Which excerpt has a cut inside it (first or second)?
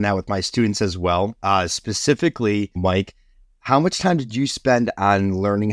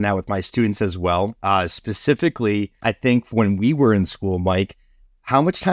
first